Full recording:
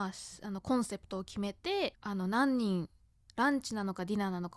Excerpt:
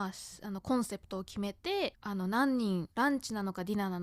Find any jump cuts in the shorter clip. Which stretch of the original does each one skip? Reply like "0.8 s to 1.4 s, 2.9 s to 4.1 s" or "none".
2.9 s to 3.3 s